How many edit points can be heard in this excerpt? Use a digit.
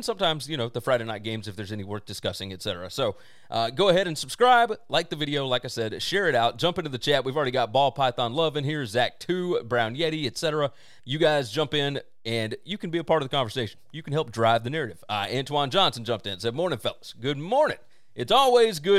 0